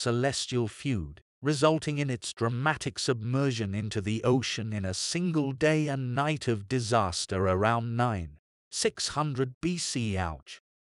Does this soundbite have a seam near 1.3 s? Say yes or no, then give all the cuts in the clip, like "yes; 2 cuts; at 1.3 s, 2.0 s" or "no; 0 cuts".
yes; 1 cut; at 1.3 s